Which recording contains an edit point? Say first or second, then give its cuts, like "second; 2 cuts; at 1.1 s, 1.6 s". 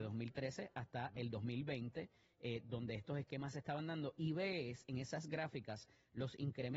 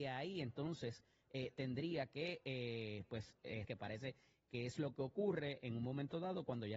second; 1 cut; at 3.6 s